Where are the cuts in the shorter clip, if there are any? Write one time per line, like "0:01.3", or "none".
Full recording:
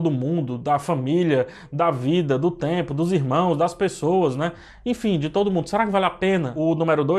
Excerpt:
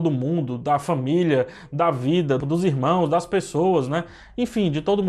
0:02.4